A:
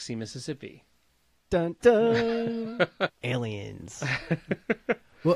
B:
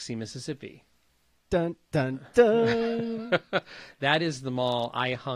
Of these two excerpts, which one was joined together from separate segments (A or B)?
A